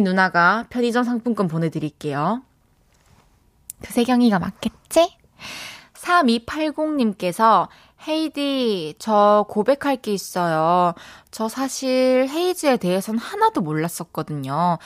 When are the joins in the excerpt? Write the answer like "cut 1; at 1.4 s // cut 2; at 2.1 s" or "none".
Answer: none